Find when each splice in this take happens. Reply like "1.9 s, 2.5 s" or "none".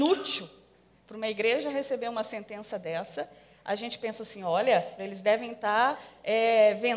0.9 s, 5.0 s

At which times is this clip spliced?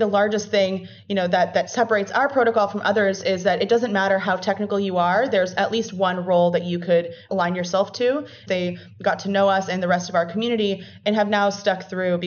8.5 s

